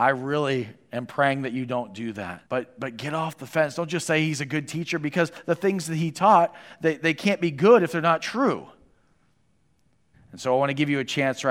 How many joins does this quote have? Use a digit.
2